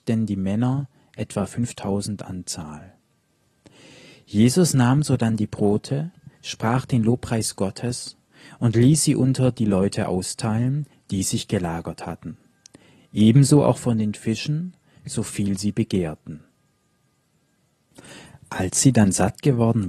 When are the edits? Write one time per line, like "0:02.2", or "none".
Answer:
none